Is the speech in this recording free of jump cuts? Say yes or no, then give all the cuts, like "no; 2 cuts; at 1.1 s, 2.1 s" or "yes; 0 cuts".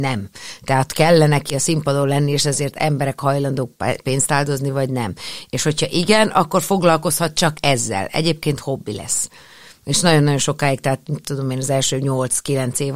yes; 0 cuts